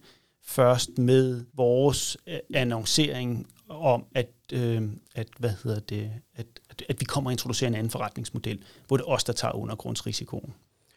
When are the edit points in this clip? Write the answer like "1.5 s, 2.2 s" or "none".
1.5 s

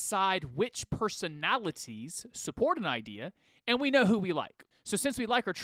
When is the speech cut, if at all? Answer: 4.7 s

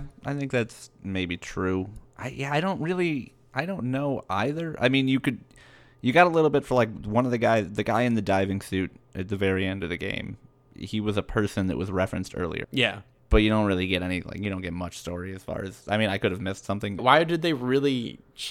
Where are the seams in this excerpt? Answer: 12.6 s, 17.0 s

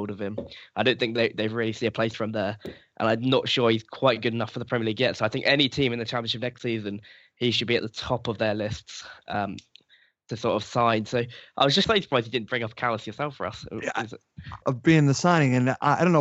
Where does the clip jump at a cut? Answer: 11.8 s, 14.6 s

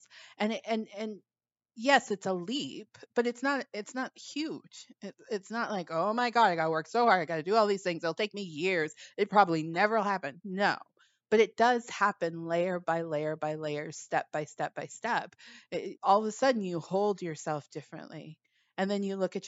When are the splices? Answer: 16.0 s

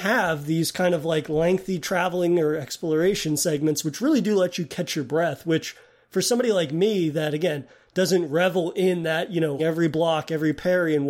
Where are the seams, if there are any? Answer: 9.6 s

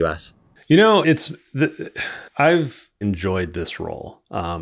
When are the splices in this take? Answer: 1.0 s, 3.0 s

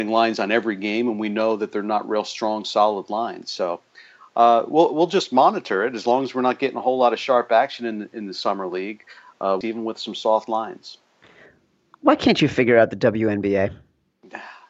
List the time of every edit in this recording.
9.6 s

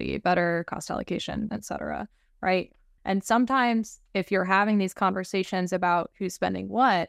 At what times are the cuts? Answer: 1.5 s, 3.0 s

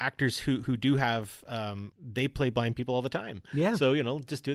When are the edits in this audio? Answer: 1.9 s

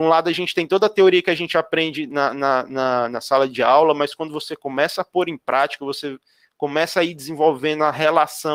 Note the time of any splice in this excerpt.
none

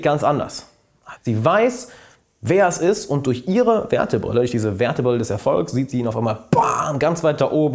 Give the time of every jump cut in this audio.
1.2 s

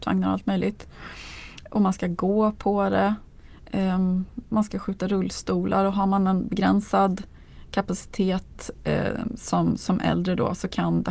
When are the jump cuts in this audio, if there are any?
none

